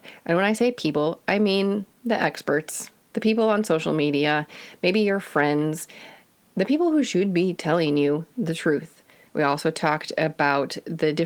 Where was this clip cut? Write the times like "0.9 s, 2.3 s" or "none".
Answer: 9.3 s